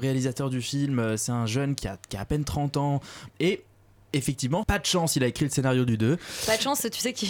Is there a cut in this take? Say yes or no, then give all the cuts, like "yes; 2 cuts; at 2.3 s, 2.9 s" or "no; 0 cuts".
yes; 2 cuts; at 3.3 s, 4.6 s